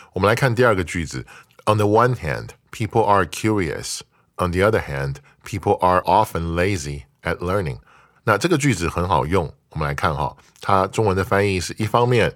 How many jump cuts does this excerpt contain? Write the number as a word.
one